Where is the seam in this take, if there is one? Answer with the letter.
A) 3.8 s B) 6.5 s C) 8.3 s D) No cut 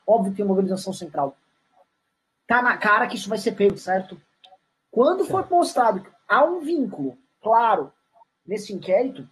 A